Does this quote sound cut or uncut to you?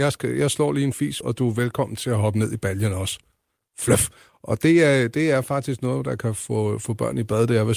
cut